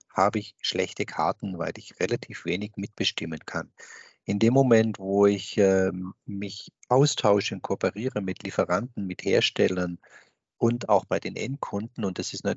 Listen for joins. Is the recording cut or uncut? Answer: uncut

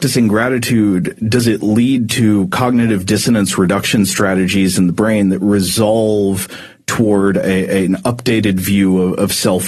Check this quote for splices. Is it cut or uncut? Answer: uncut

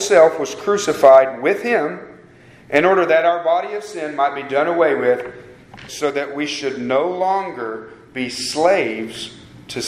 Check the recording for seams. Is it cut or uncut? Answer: cut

